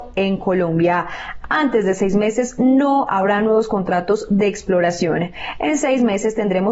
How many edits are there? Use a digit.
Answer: 1